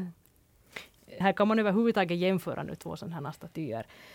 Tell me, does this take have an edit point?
yes; 1 cut; at 1.2 s

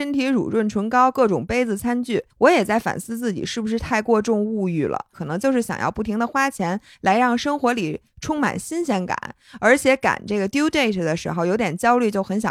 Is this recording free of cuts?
no; 2 cuts; at 2.3 s, 5.1 s

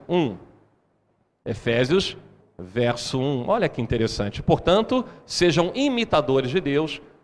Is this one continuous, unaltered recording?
no; 1 cut; at 2.4 s

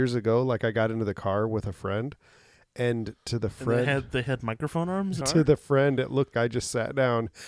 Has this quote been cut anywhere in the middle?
yes; 2 cuts; at 5.2 s, 6.3 s

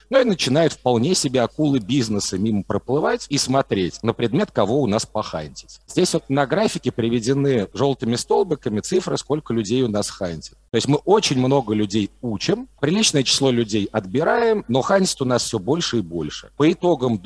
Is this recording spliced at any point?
no; 0 cuts

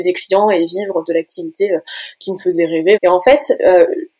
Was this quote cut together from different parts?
yes; 1 cut; at 3.0 s

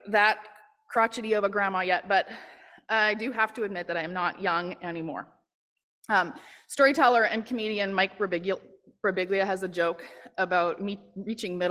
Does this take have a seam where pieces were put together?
no; 0 cuts

